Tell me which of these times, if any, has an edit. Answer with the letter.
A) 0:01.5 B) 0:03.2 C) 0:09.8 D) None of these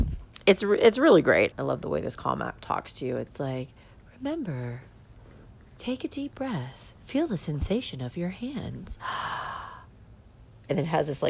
A